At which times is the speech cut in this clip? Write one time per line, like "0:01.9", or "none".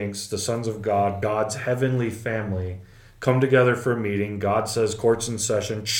none